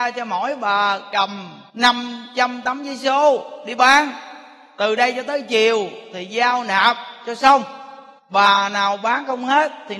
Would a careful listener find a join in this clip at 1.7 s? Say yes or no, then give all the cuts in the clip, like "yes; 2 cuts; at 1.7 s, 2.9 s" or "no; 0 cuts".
yes; 2 cuts; at 1.7 s, 8.2 s